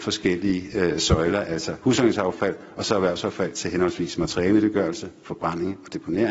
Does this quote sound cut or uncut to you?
uncut